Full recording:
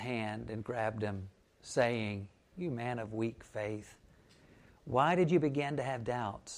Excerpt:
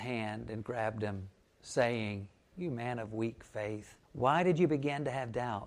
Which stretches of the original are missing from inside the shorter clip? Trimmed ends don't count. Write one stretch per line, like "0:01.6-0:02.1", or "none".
0:04.0-0:04.8